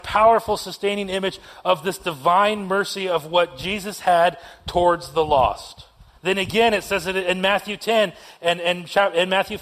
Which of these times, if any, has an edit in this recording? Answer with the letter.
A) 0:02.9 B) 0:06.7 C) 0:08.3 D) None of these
D